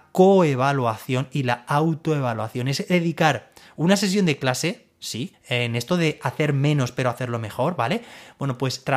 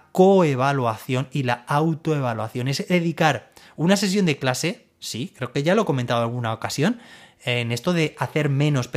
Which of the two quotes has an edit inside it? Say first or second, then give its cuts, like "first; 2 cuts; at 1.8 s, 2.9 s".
first; 1 cut; at 5.3 s